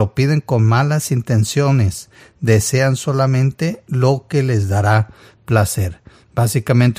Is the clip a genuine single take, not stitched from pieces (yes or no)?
yes